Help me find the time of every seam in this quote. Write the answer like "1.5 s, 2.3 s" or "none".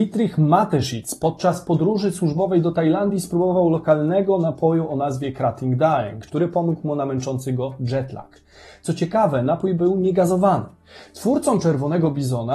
6.3 s